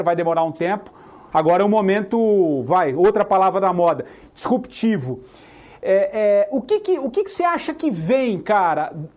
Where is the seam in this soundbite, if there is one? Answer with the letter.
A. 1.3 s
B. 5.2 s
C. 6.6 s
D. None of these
A